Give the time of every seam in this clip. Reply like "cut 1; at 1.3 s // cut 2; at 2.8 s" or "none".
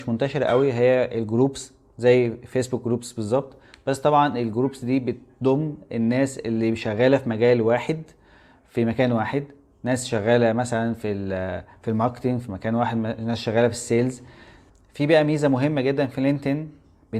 none